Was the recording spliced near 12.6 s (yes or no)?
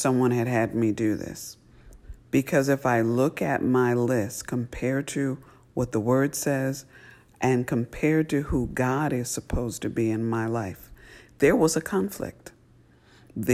no